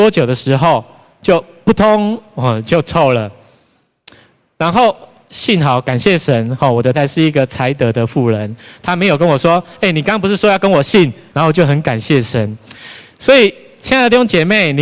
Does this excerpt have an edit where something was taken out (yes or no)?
yes